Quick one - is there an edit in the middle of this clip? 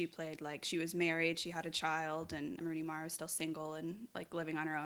yes; 1 cut; at 2.6 s

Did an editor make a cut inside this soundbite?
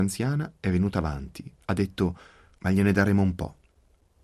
yes; 1 cut; at 2.6 s

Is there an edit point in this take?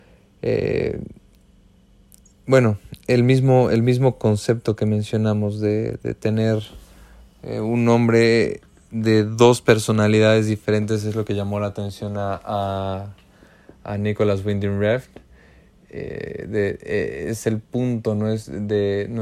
no; 0 cuts

